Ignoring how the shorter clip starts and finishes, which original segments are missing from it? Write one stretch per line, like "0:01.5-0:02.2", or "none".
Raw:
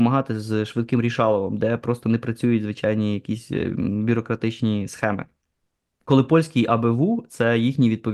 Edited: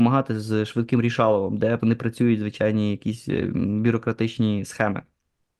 0:01.8-0:02.0